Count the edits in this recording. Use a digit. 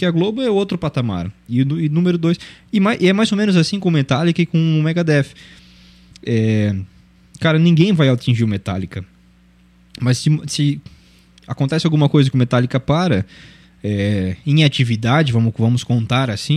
0